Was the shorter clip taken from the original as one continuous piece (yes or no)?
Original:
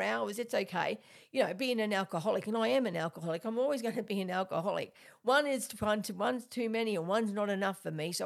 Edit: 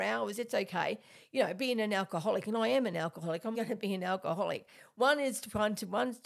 no